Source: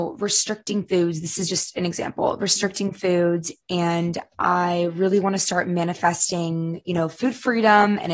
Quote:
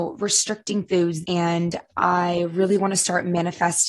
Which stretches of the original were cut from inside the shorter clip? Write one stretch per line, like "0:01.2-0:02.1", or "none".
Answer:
0:01.2-0:03.6